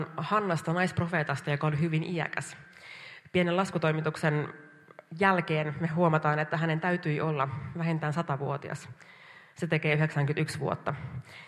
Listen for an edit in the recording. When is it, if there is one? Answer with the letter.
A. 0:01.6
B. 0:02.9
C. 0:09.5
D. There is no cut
C